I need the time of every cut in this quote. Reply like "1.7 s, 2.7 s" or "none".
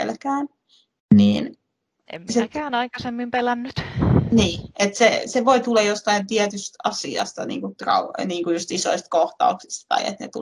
none